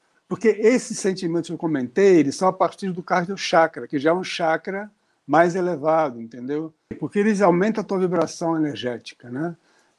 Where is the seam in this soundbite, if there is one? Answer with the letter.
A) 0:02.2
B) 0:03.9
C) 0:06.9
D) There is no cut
C